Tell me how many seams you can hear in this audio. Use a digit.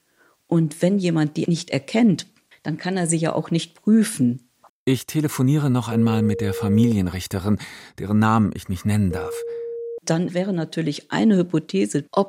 2